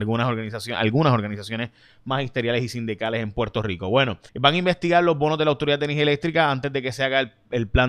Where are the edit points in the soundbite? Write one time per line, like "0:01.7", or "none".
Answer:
0:04.3